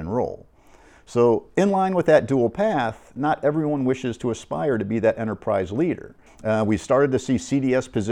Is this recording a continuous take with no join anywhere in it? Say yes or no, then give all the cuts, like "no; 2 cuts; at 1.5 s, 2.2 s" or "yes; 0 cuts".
no; 1 cut; at 6.3 s